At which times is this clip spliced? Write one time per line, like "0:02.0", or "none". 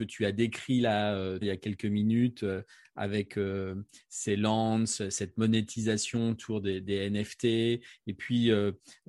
0:01.4